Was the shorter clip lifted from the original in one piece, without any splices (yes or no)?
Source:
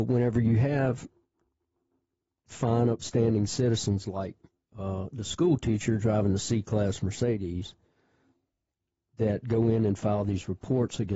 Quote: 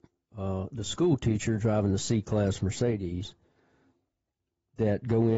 yes